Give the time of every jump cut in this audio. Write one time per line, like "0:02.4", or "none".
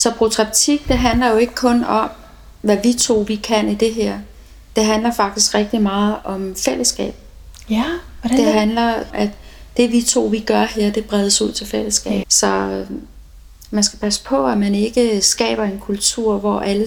0:09.1
0:12.2